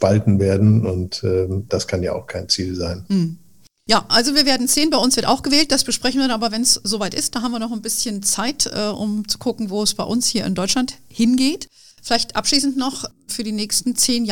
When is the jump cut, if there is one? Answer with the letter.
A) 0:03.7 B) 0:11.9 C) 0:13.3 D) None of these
C